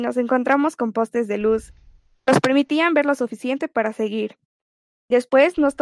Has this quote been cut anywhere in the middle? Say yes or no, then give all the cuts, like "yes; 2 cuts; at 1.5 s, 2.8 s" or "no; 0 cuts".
no; 0 cuts